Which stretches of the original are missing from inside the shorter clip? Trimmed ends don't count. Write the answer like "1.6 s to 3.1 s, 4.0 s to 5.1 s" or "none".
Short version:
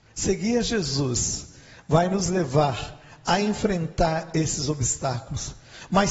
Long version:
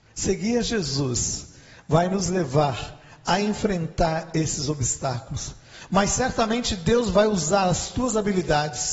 none